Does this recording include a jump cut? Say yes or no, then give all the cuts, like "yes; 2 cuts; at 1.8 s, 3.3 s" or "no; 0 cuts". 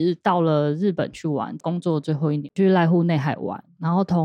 no; 0 cuts